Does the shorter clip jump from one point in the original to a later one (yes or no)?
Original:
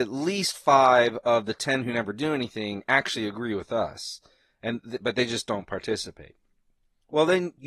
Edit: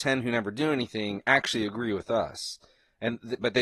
no